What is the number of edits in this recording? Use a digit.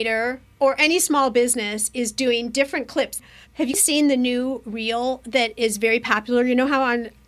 1